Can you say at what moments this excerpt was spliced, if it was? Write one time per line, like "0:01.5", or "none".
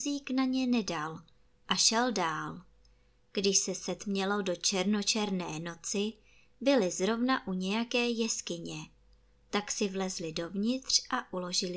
none